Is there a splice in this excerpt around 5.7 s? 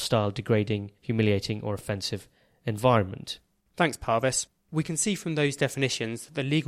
no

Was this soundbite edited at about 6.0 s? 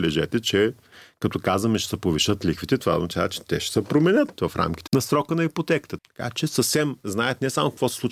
yes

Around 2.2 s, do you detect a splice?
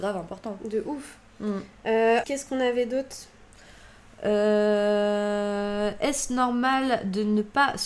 yes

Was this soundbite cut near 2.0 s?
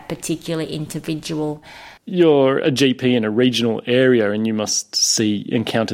yes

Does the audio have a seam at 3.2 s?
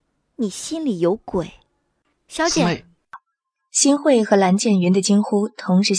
no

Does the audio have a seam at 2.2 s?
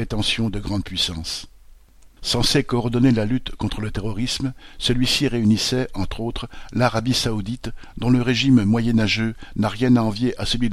yes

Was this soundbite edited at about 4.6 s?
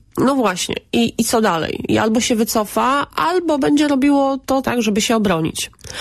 yes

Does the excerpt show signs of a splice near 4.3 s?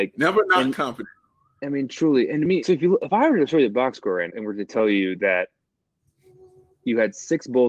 yes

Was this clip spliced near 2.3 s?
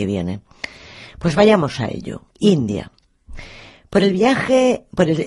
yes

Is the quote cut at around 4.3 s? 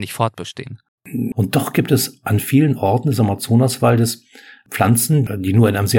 no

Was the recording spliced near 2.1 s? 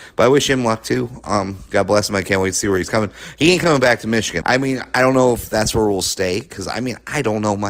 no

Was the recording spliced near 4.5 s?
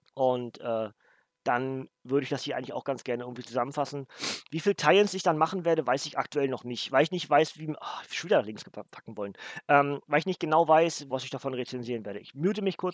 no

